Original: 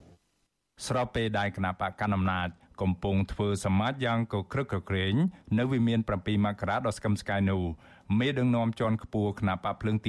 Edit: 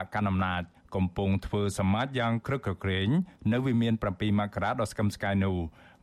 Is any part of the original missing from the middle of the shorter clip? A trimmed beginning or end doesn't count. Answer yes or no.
yes